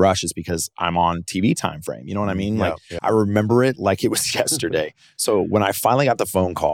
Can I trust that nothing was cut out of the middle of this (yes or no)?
no